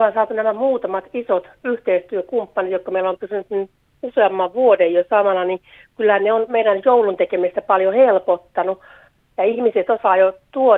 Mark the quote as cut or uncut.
cut